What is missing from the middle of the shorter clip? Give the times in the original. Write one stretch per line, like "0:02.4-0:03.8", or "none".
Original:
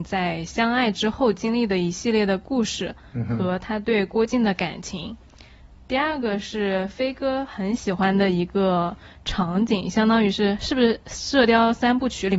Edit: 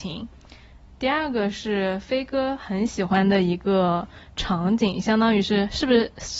none

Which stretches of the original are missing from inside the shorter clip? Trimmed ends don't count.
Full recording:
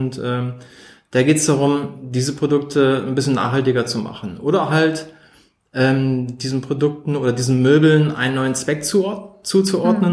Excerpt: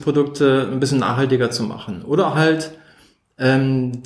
none

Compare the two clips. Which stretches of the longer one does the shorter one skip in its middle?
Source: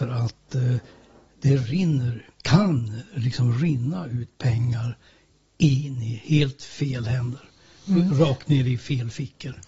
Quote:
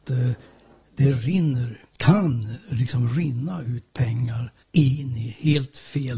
0:05.0-0:05.5

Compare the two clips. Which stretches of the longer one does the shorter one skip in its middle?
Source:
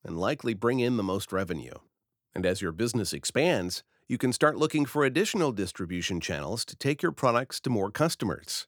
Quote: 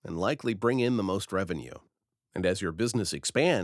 none

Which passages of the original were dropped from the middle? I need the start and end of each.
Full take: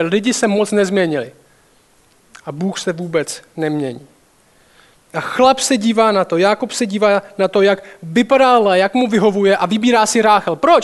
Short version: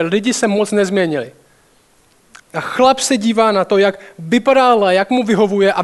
0:02.4-0:05.0
0:06.3-0:07.5

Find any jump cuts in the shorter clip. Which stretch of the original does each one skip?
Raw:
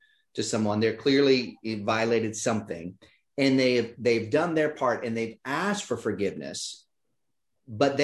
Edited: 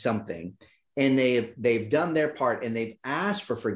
none

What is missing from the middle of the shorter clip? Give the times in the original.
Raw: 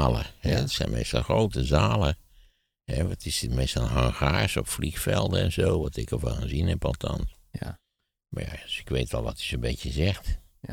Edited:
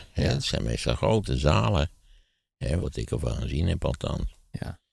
0:03.1-0:05.8

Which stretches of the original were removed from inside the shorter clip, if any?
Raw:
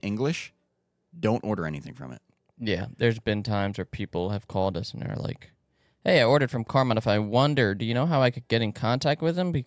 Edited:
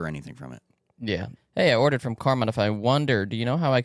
0:03.0-0:05.9

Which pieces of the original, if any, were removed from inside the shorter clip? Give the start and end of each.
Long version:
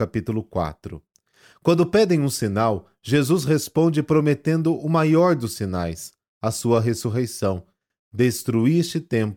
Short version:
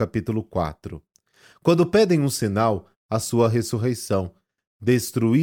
0:02.9-0:06.2

